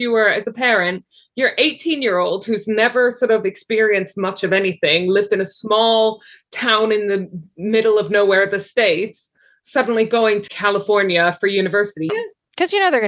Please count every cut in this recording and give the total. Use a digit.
2